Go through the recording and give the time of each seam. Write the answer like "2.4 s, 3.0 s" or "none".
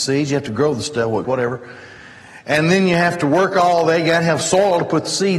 1.2 s